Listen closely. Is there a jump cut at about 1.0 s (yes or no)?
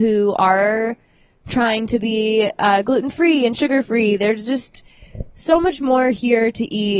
no